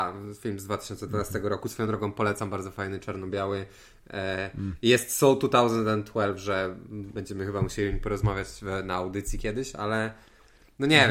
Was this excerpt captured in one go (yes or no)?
yes